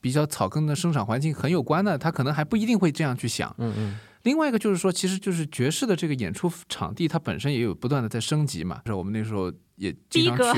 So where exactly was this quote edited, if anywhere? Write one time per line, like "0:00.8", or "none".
0:08.9